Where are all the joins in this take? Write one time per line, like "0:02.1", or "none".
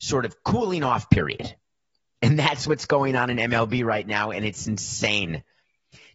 none